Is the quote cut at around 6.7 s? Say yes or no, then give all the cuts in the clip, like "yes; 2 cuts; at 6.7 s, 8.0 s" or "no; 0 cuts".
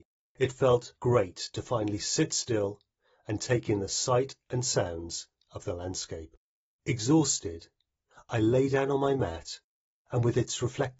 yes; 1 cut; at 6.7 s